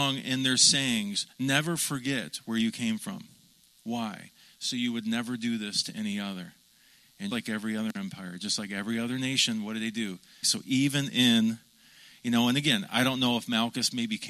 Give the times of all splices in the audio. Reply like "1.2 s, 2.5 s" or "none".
7.3 s, 10.4 s